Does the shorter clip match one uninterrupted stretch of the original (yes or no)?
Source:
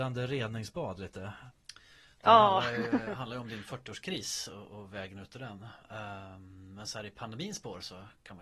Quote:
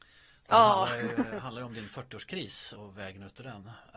no